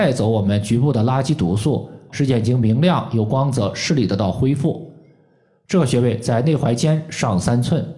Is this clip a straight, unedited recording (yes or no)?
no